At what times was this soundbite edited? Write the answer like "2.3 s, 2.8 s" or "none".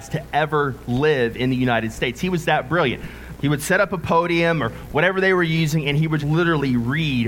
3.4 s, 6.2 s

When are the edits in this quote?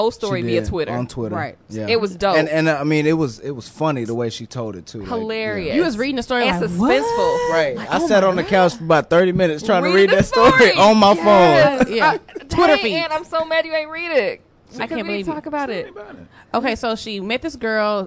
none

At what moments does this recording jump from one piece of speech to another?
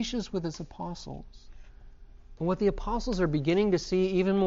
2.4 s

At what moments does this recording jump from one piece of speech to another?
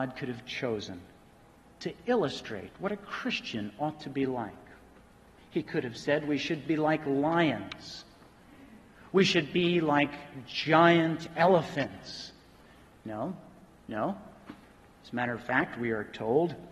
13.8 s

